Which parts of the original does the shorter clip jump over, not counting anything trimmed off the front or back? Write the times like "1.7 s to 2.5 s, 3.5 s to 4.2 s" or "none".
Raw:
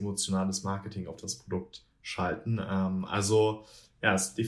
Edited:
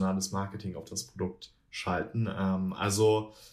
none